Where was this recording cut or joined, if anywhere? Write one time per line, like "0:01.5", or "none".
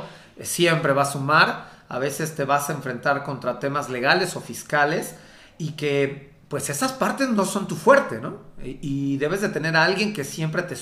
none